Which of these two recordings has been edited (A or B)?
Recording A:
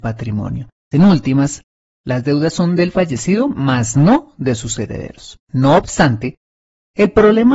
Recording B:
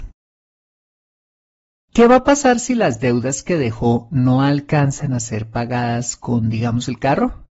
A